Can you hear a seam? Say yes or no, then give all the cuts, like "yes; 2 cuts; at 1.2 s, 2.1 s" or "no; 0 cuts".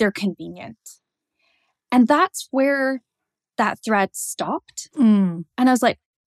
no; 0 cuts